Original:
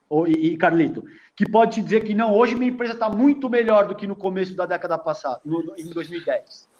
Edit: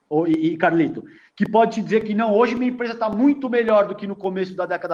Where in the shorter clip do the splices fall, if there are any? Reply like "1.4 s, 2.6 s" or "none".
none